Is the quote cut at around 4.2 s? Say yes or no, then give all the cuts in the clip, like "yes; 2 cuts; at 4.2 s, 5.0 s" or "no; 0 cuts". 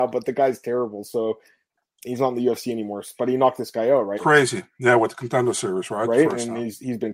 yes; 1 cut; at 4.2 s